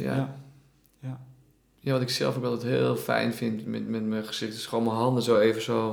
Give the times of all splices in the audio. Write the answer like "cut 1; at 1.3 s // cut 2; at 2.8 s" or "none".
none